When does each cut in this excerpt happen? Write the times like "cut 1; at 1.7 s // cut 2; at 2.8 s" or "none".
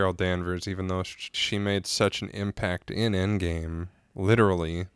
cut 1; at 1.3 s

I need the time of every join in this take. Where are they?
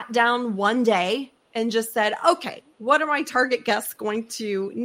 none

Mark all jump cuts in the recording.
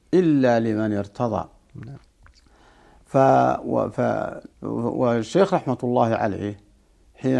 cut 1; at 4.5 s

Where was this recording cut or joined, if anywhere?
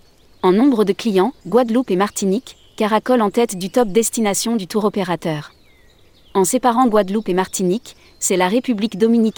cut 1; at 1.4 s

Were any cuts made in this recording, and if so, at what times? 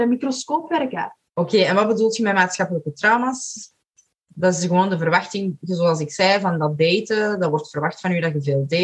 cut 1; at 1.3 s

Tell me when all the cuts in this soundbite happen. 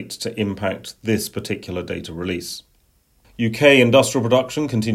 cut 1; at 3.2 s

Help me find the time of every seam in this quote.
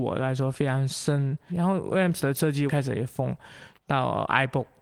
cut 1; at 1.5 s // cut 2; at 2.7 s // cut 3; at 3.8 s

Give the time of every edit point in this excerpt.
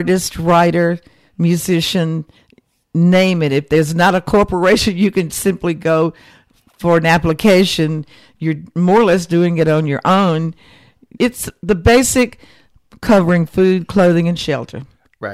cut 1; at 11.2 s

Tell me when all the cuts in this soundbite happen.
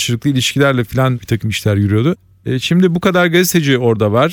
none

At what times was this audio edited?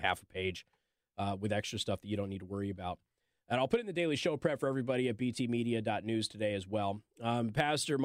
none

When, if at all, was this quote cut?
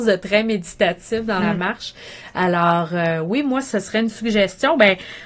none

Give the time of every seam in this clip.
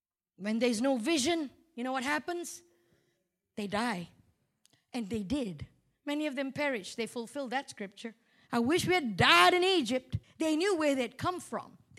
cut 1; at 5.9 s // cut 2; at 8.5 s // cut 3; at 10.2 s

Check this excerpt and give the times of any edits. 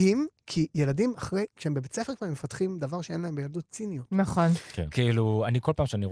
cut 1; at 4.9 s

